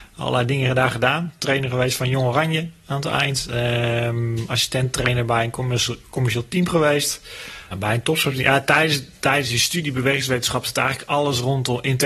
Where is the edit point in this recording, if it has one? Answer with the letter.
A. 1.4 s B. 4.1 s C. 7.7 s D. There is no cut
C